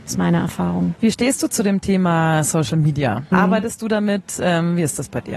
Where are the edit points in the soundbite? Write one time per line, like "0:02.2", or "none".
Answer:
0:03.3

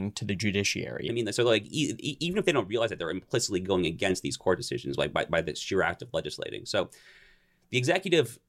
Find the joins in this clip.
0:01.1

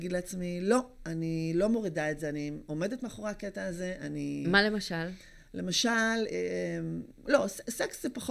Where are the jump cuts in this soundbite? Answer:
0:07.3

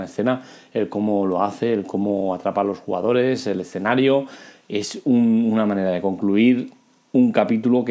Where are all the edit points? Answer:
none

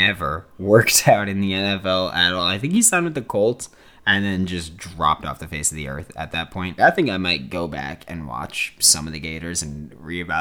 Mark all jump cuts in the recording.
0:06.8

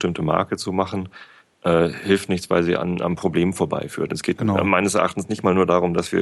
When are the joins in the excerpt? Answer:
none

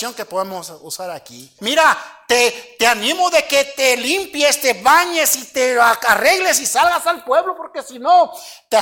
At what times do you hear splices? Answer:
0:01.6

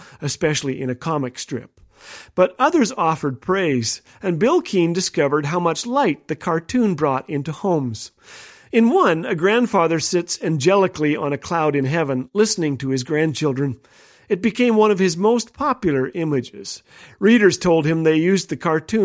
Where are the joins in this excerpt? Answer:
none

